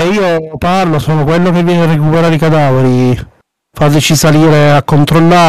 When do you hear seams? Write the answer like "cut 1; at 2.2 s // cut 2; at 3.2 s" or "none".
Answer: cut 1; at 1.0 s